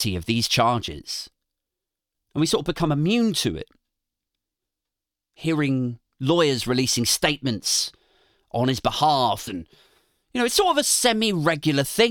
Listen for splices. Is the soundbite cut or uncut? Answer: cut